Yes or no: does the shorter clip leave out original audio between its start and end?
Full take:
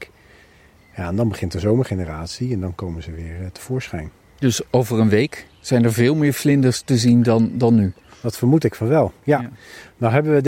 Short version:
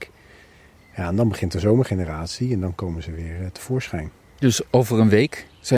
no